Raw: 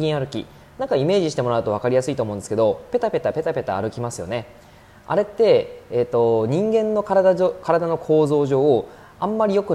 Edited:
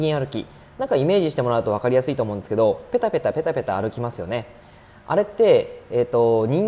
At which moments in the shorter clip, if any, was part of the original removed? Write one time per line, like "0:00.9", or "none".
none

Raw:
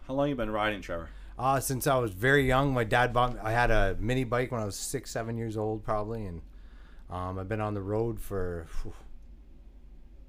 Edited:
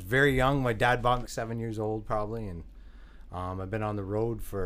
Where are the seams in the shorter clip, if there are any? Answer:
0:01.3

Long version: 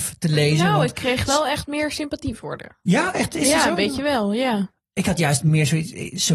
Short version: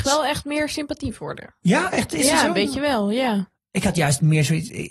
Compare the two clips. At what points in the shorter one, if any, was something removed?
none

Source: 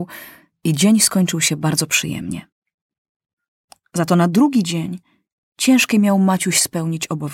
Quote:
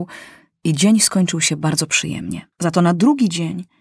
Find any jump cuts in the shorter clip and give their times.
0:02.5

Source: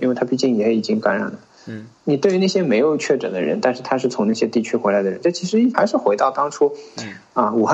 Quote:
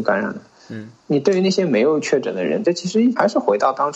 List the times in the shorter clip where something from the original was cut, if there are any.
0:02.6

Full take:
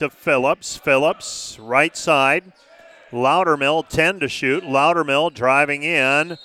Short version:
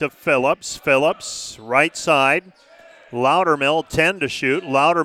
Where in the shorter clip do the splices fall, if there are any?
none

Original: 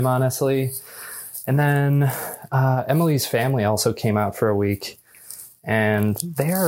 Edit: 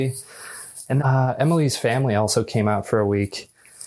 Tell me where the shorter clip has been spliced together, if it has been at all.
0:01.0

